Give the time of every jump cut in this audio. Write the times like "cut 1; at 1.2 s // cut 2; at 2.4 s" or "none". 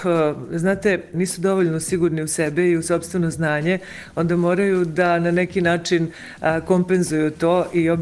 cut 1; at 1.1 s